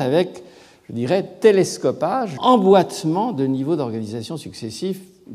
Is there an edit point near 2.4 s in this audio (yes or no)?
yes